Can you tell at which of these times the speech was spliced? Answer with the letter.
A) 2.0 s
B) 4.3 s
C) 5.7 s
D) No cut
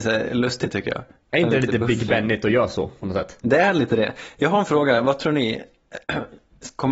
D